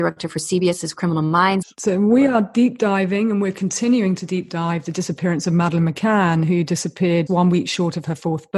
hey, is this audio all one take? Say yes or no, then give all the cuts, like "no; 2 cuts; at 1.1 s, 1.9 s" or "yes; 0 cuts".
no; 2 cuts; at 1.6 s, 7.3 s